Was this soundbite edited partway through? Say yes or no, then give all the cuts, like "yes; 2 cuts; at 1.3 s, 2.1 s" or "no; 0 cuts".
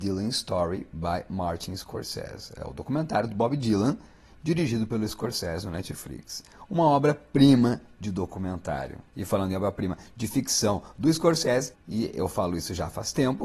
yes; 2 cuts; at 9.1 s, 11.7 s